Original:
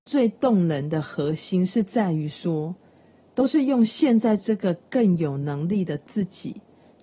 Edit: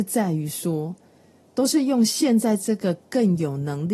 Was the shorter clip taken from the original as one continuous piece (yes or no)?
yes